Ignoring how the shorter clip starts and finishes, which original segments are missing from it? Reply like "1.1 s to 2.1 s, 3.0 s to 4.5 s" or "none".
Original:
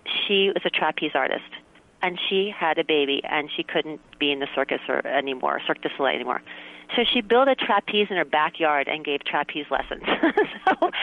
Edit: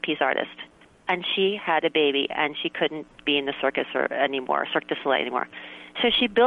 none